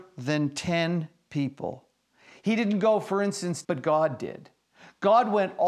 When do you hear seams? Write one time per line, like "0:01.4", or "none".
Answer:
0:03.6